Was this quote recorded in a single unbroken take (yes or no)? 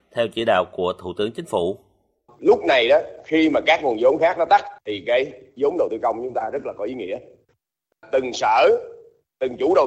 yes